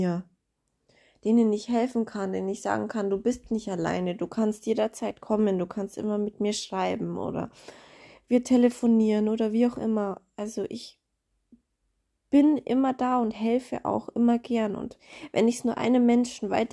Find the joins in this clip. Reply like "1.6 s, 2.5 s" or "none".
none